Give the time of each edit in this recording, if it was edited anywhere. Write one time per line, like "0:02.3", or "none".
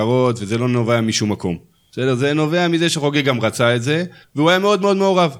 0:04.2